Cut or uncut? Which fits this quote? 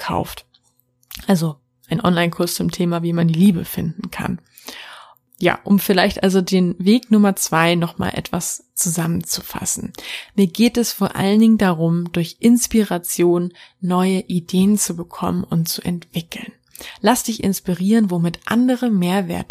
uncut